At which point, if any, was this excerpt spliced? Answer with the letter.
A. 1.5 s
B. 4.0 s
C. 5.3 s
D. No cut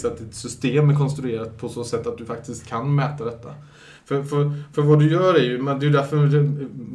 D